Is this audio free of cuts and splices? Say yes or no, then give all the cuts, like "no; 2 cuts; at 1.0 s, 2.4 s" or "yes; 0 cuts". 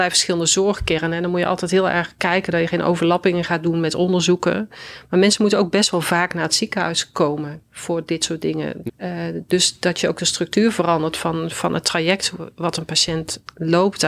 no; 1 cut; at 8.9 s